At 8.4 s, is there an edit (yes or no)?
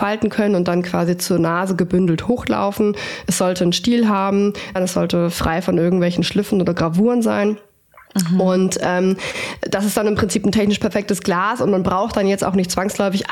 no